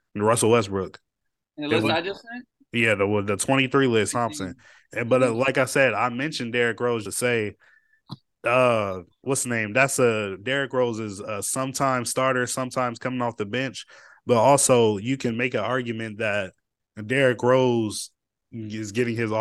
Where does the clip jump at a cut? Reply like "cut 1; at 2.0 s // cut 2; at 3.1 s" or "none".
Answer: cut 1; at 4.1 s // cut 2; at 7.0 s